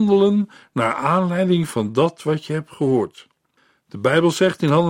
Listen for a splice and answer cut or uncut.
uncut